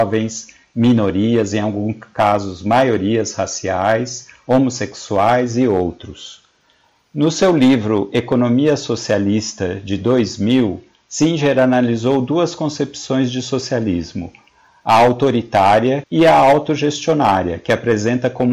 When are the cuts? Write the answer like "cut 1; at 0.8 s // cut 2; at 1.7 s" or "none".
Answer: cut 1; at 16.0 s

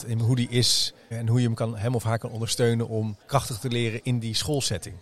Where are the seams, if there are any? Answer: cut 1; at 1.1 s // cut 2; at 3.2 s

